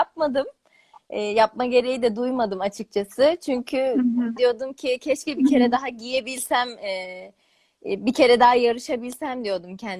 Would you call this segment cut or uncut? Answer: cut